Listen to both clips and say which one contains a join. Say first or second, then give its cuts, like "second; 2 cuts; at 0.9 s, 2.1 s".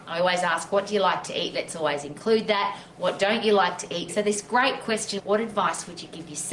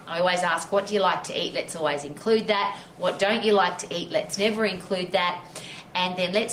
first; 2 cuts; at 4.1 s, 5.2 s